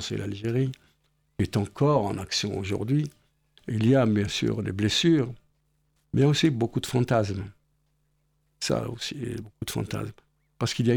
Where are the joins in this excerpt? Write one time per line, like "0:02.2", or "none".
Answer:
none